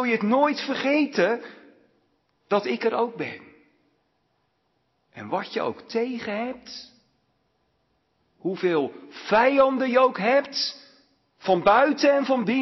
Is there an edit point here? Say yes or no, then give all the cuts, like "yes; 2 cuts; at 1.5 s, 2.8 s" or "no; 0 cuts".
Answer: no; 0 cuts